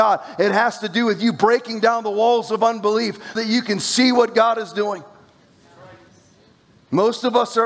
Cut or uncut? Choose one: cut